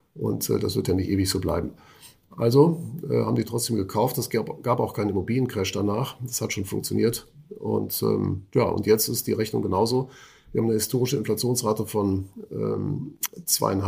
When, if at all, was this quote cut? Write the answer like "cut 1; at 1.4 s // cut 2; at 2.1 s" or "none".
none